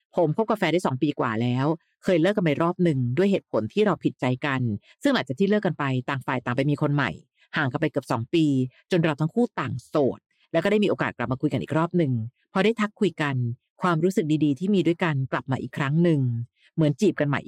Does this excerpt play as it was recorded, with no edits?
yes; 0 cuts

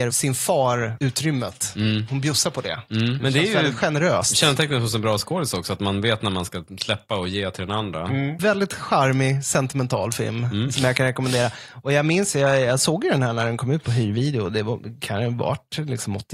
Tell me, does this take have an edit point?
no; 0 cuts

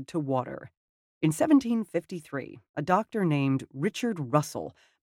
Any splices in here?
yes; 1 cut; at 1.1 s

